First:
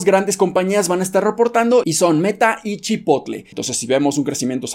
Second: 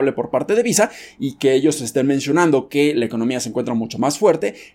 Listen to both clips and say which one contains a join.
first; 1 cut; at 3.5 s

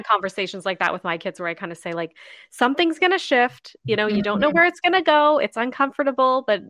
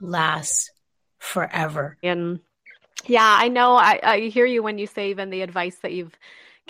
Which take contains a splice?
second; 1 cut; at 2.0 s

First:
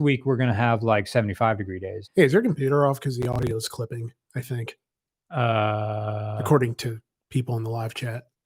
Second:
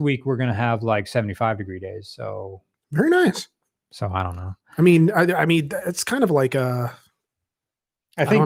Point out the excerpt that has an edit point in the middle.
first; 1 cut; at 2.0 s

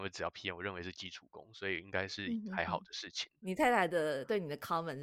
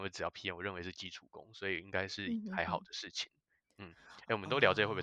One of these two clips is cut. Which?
first; 1 cut; at 3.4 s

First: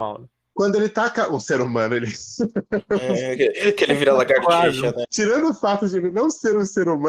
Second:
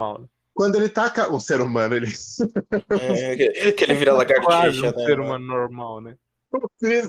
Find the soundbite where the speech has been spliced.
first; 1 cut; at 5.0 s

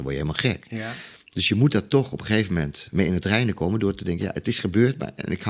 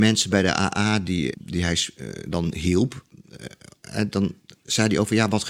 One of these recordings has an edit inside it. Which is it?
second; 1 cut; at 1.3 s

